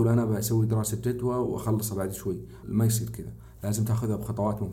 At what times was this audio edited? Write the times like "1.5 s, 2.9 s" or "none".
2.6 s

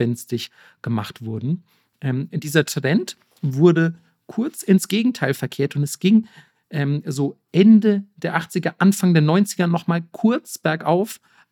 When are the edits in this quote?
none

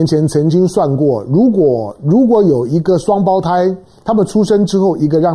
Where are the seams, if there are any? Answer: none

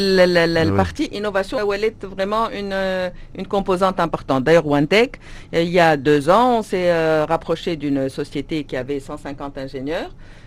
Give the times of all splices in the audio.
1.6 s

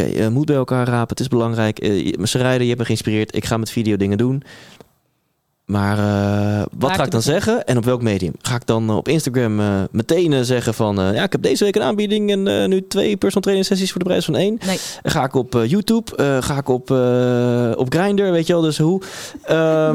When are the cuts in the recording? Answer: none

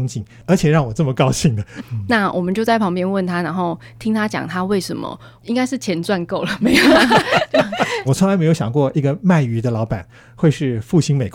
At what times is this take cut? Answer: 1.8 s, 8.0 s

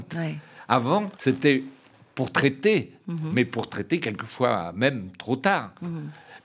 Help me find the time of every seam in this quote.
1.2 s

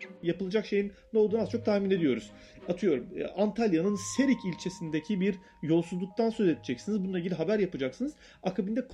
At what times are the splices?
none

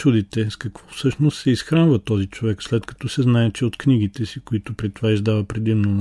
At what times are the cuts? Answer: none

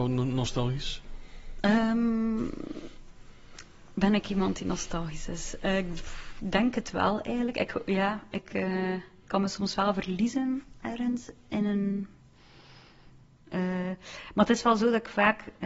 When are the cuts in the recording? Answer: 13.4 s

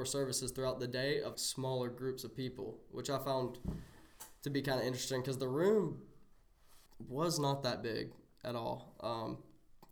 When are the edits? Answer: 1.3 s, 6.9 s

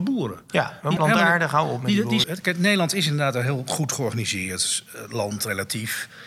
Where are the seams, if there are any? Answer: 1.0 s, 2.2 s

